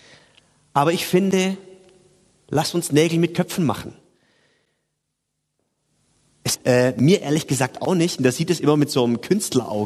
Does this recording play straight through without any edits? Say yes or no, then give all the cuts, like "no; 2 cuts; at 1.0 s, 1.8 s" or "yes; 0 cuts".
no; 2 cuts; at 6.6 s, 8.2 s